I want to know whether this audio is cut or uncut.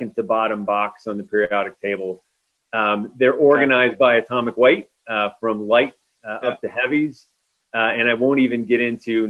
uncut